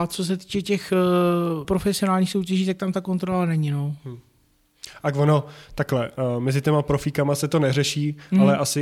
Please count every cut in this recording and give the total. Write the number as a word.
one